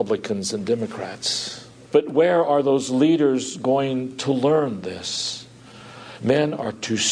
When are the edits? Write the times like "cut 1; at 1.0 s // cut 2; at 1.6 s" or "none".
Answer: cut 1; at 1.8 s // cut 2; at 6.2 s